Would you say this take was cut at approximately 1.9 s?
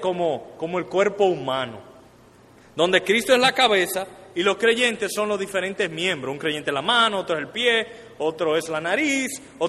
no; 0 cuts

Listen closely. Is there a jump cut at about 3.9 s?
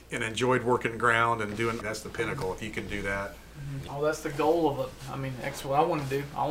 yes; 2 cuts; at 1.8 s, 3.9 s

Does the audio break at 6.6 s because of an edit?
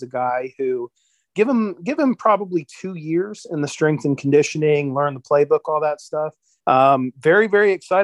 yes; 1 cut; at 6.6 s

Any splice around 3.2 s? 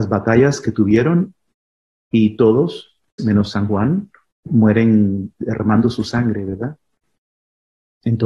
yes; 1 cut; at 3.2 s

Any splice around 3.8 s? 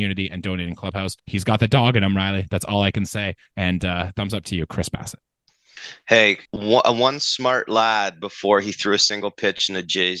no; 2 cuts; at 1.2 s, 6.5 s

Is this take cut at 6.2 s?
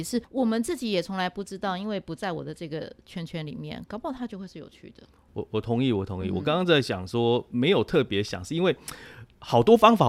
no; 0 cuts

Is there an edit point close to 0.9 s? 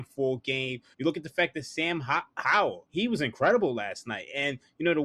yes; 2 cuts; at 0.9 s, 2.9 s

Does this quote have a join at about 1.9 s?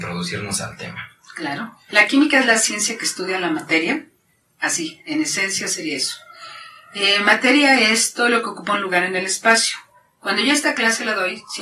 yes; 1 cut; at 1.9 s

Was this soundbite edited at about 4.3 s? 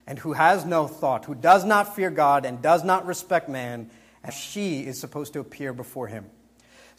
yes; 1 cut; at 4.3 s

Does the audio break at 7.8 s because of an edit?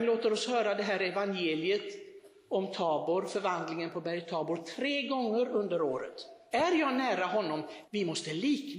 yes; 2 cuts; at 6.5 s, 7.8 s

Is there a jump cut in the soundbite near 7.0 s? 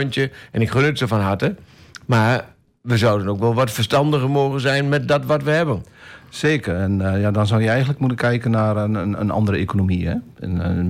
no; 0 cuts

